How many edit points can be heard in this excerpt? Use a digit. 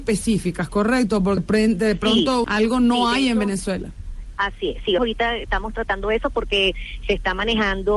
3